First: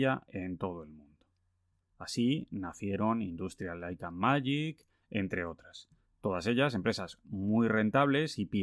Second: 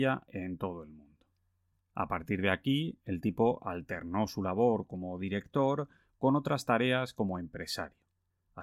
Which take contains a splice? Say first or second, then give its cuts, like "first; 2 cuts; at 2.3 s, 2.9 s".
first; 2 cuts; at 1.8 s, 5.0 s